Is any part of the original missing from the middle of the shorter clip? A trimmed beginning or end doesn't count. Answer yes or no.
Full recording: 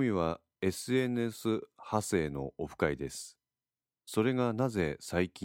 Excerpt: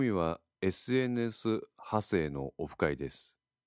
no